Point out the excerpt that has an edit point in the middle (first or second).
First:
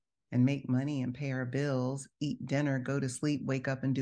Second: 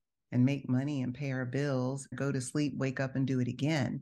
second